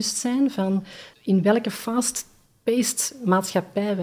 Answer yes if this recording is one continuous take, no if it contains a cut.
no